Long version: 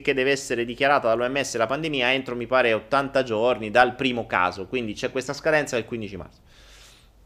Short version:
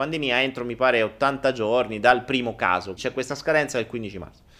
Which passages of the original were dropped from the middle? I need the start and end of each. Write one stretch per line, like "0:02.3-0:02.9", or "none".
0:04.7-0:04.9